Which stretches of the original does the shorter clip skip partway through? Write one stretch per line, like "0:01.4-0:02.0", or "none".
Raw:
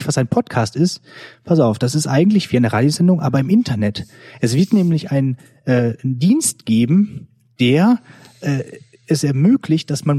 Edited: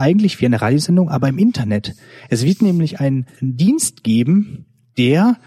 0:05.5-0:06.0